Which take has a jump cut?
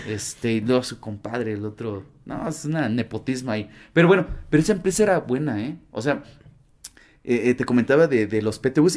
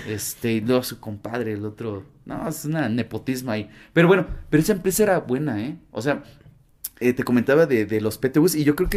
second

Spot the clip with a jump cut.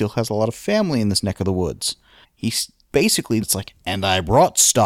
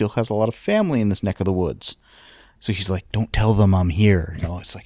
first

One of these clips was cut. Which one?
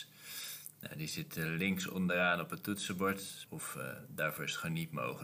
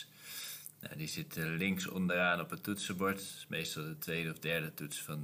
first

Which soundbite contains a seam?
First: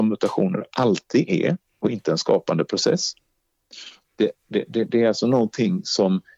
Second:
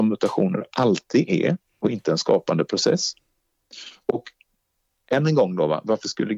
first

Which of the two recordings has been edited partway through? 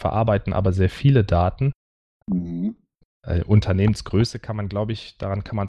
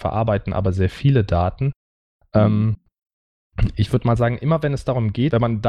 first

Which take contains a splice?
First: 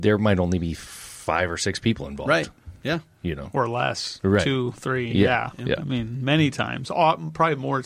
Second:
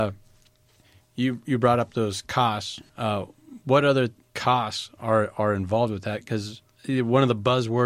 second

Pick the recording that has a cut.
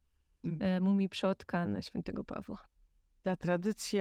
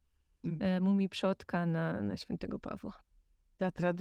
first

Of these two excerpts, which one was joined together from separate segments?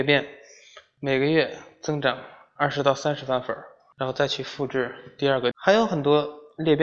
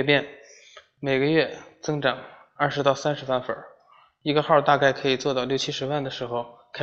first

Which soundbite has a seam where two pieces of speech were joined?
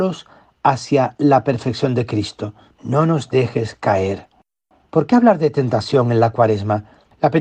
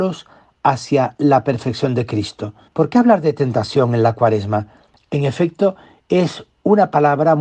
second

